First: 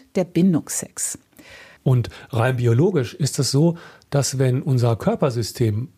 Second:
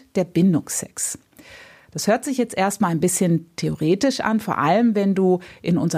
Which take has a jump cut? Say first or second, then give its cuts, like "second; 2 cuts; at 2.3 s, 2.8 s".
first; 1 cut; at 1.8 s